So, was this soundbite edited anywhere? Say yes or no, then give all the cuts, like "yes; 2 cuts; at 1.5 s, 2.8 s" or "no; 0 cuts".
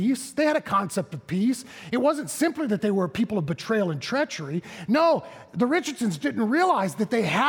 yes; 1 cut; at 6.2 s